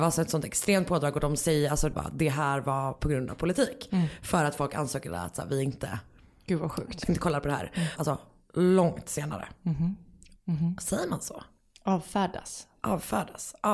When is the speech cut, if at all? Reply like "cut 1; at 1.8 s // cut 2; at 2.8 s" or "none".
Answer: cut 1; at 1.9 s // cut 2; at 8.0 s // cut 3; at 10.4 s